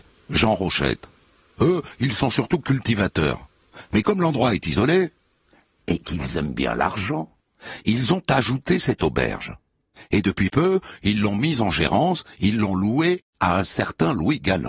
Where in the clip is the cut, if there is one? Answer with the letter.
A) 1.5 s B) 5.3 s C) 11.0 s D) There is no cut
D